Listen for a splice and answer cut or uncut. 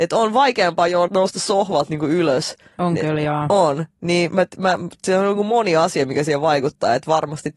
cut